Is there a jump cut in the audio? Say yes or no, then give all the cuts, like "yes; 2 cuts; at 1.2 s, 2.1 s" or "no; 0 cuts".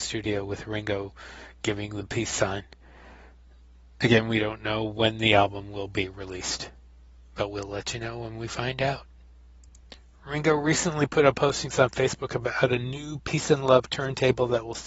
no; 0 cuts